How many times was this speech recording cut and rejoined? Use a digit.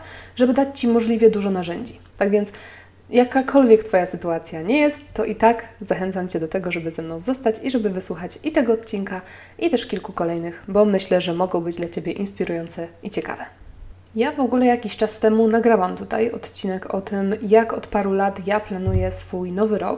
1